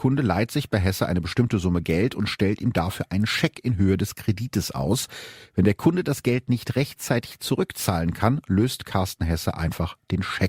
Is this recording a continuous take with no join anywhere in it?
yes; 0 cuts

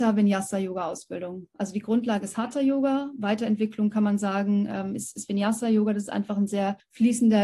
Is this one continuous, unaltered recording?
yes; 0 cuts

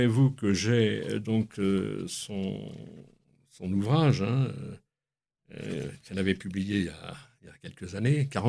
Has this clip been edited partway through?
no; 0 cuts

